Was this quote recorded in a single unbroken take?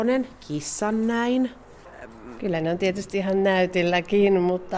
no; 1 cut; at 2.4 s

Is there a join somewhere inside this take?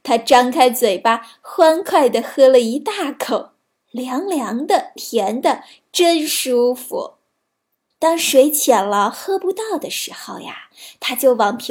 yes; 2 cuts; at 5.0 s, 7.9 s

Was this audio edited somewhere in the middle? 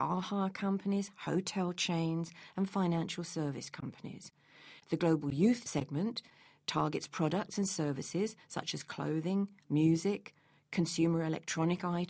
no; 0 cuts

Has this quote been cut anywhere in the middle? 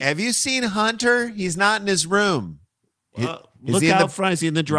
no; 0 cuts

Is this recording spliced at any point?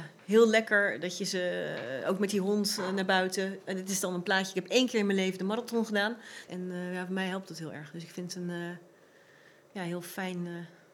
yes; 1 cut; at 6.5 s

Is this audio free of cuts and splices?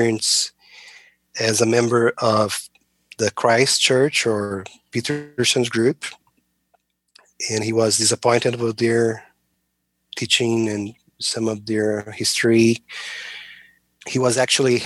yes; 0 cuts

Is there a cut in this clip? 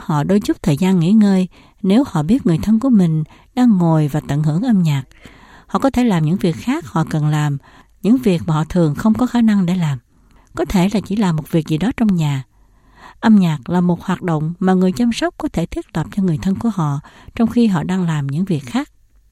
no; 0 cuts

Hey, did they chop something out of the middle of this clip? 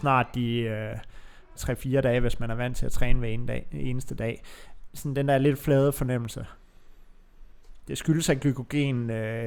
yes; 2 cuts; at 1.5 s, 7.9 s

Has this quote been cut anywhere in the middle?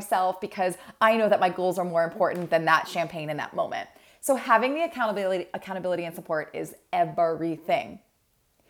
no; 0 cuts

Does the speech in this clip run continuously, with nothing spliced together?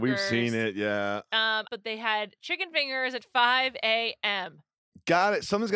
no; 1 cut; at 1.7 s

